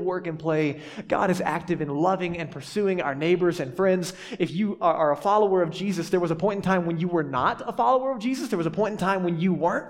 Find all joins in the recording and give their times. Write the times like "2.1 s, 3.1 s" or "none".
5.0 s